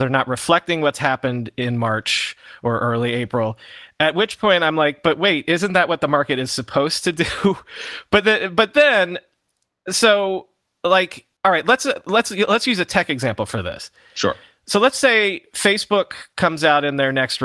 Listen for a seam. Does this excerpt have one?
yes; 1 cut; at 11.4 s

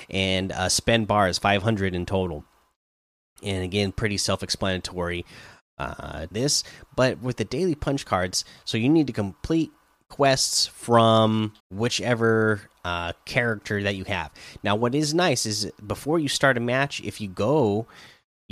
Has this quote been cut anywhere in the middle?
yes; 2 cuts; at 6.3 s, 11.6 s

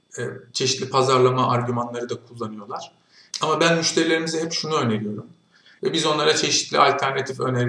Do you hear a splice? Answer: yes; 2 cuts; at 3.3 s, 5.8 s

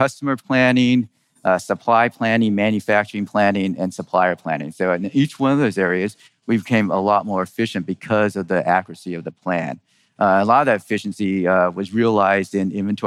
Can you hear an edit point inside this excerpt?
no; 0 cuts

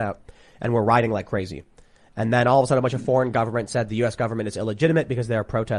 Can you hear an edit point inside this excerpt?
no; 0 cuts

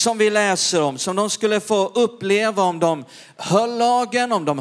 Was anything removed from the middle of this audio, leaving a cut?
no; 0 cuts

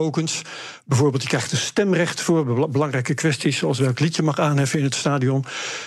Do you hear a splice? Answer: no; 0 cuts

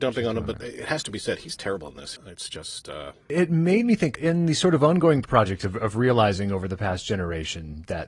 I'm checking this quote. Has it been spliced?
yes; 1 cut; at 2.2 s

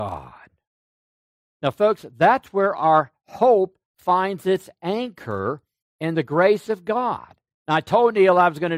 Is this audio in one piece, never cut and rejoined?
yes; 0 cuts

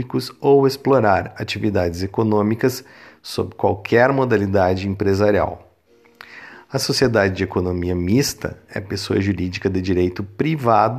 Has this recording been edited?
no; 0 cuts

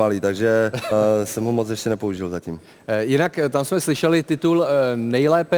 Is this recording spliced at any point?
yes; 1 cut; at 0.9 s

